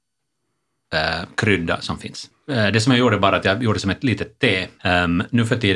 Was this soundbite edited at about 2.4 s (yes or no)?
no